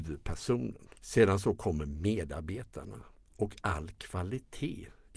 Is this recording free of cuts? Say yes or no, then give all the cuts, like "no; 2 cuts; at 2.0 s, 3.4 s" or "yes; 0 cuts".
no; 1 cut; at 1.0 s